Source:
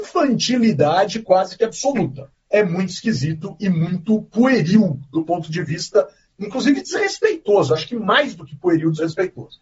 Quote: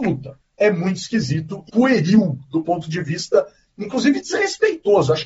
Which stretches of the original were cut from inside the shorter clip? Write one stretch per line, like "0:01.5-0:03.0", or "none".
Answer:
0:03.6-0:04.3